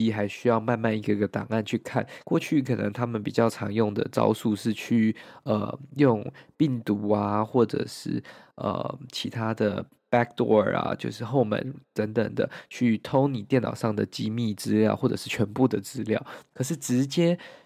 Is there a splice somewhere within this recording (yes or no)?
yes